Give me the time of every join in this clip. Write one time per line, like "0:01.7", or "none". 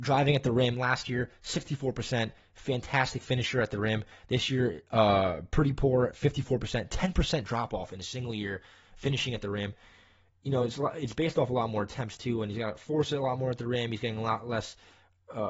none